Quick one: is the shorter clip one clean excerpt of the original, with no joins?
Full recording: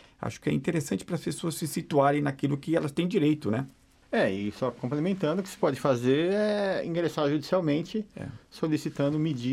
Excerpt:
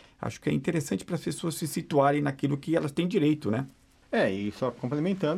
yes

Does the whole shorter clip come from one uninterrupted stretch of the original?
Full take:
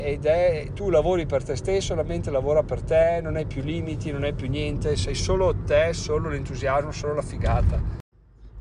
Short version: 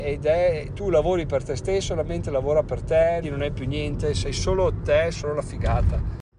no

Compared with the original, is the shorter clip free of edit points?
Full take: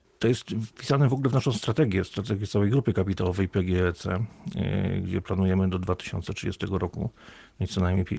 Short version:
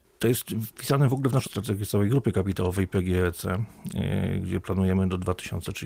no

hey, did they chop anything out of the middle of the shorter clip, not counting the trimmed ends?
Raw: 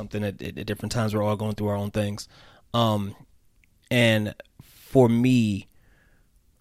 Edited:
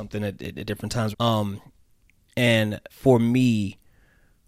yes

